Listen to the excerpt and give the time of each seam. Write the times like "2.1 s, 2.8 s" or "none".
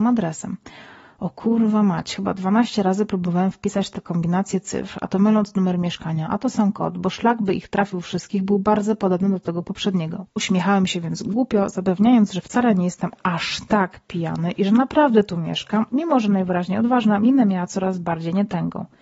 15.9 s